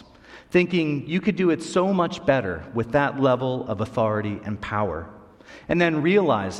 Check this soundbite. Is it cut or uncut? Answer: uncut